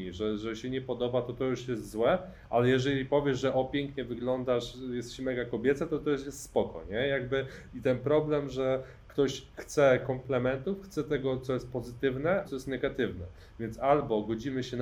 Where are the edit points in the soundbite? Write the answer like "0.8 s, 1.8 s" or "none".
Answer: 12.4 s